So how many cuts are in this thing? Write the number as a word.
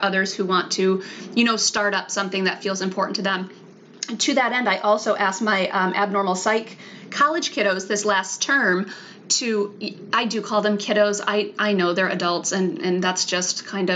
zero